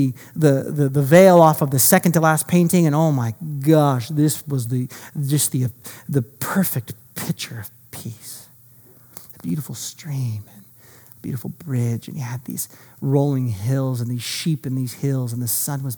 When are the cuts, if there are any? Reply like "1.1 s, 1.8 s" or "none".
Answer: none